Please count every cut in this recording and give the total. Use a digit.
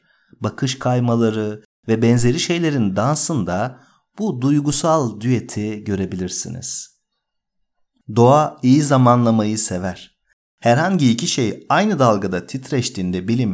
0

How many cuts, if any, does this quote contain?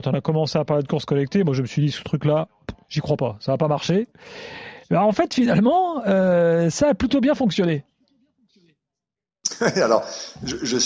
0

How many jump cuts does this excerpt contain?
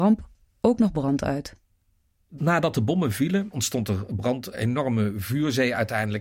2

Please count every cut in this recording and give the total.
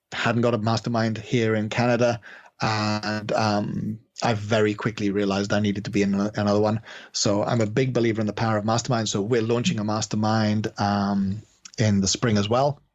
0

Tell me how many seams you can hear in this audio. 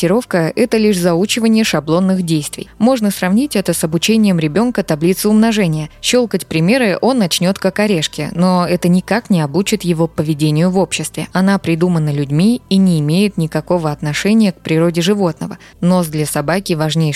2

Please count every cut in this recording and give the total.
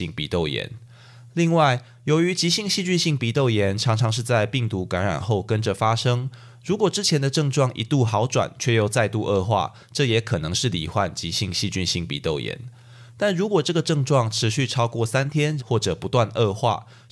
2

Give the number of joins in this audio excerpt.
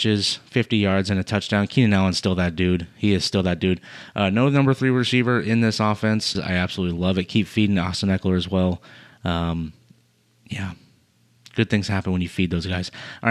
1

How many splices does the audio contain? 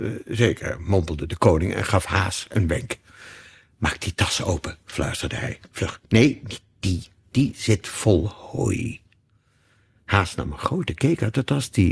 0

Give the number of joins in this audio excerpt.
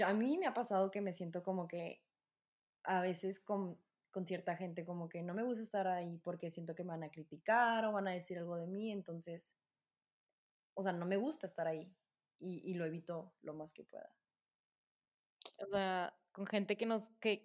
1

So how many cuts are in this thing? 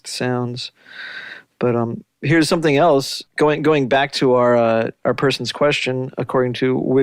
1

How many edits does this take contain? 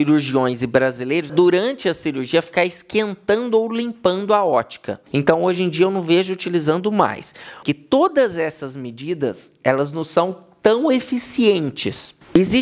3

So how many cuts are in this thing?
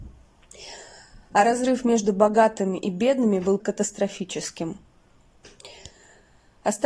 1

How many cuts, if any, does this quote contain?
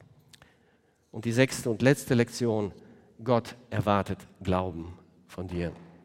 0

